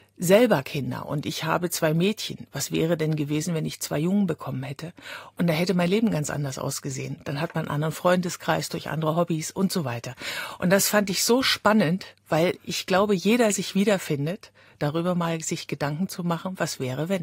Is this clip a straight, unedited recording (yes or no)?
yes